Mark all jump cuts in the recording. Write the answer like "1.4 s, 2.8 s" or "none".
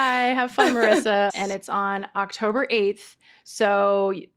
1.3 s